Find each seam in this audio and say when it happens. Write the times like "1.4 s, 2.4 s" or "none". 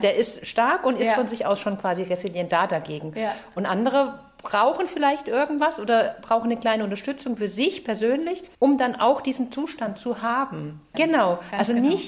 8.5 s, 10.9 s

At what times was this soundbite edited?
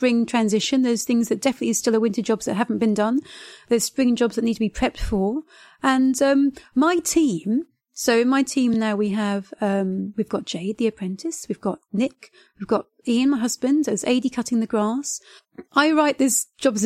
none

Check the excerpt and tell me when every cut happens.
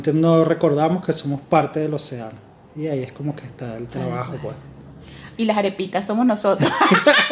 5.4 s

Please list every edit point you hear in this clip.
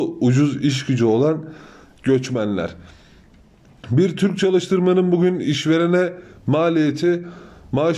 none

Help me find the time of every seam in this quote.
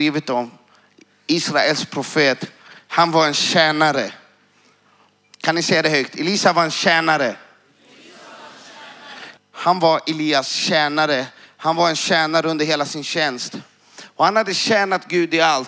9.4 s

